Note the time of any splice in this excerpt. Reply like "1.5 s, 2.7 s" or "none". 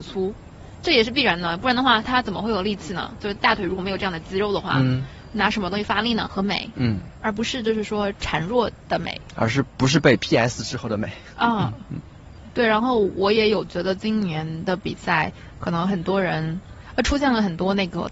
6.3 s